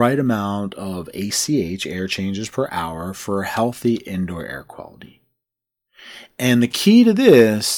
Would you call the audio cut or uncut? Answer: uncut